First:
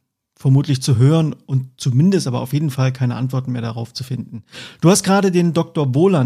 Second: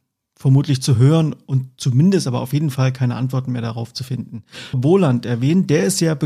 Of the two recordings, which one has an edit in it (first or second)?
second